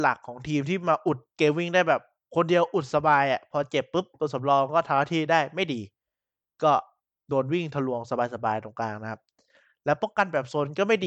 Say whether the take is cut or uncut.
uncut